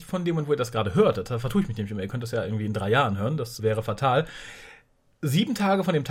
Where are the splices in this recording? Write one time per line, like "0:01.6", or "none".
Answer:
0:03.6